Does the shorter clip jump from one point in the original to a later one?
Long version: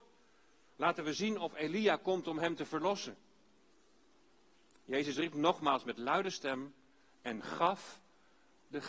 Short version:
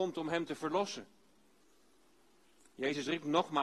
no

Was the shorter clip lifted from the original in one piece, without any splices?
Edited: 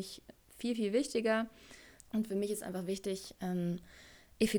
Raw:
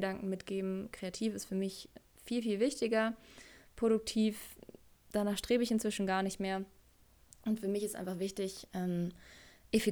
no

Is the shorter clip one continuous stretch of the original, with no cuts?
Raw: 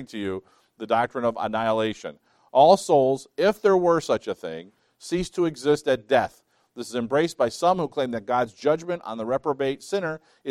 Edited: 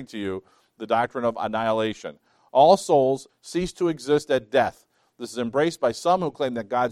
no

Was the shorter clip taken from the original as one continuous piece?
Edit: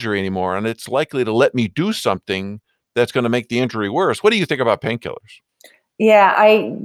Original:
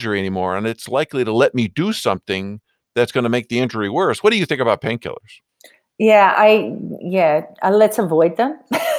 yes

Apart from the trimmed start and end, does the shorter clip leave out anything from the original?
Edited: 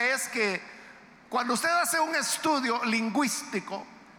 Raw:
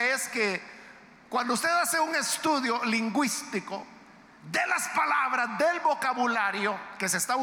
no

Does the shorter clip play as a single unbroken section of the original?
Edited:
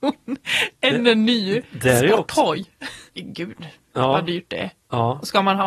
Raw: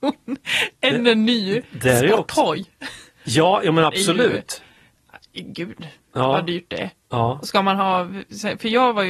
no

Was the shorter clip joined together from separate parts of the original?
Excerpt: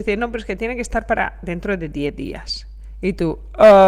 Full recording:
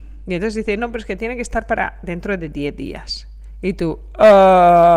no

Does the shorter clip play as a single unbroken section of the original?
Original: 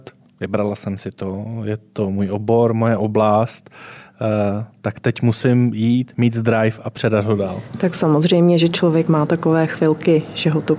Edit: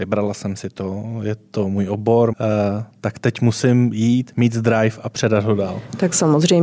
no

